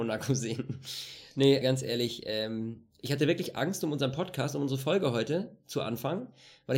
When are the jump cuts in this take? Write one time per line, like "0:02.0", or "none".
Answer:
0:01.6